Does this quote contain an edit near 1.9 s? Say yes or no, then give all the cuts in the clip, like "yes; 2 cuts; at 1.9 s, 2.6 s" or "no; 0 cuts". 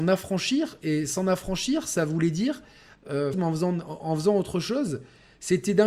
no; 1 cut; at 3.3 s